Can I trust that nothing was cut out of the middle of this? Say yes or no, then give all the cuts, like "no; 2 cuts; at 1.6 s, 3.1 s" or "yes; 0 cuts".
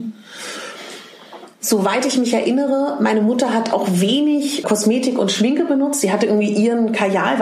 no; 1 cut; at 4.6 s